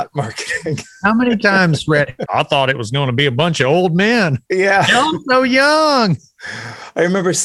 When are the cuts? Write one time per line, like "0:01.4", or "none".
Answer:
0:02.3